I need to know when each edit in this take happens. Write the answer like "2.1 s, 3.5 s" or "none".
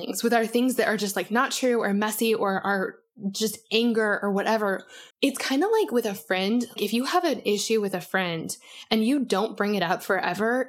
5.1 s, 6.8 s